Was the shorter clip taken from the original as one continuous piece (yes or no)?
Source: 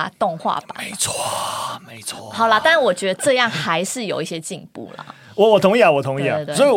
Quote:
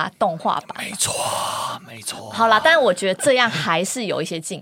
yes